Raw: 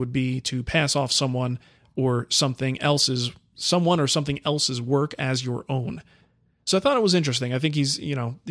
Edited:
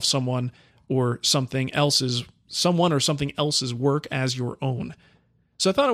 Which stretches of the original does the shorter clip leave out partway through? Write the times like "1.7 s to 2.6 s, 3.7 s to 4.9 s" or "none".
none